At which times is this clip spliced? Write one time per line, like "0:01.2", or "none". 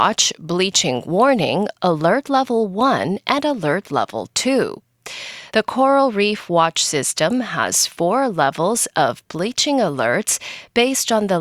0:05.5